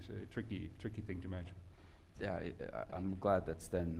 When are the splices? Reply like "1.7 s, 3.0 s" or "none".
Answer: 2.1 s